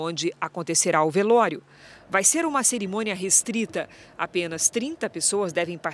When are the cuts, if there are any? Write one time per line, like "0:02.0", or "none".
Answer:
none